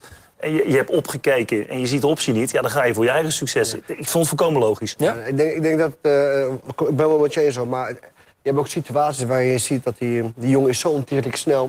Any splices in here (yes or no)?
no